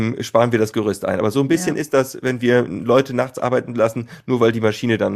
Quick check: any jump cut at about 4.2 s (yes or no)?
no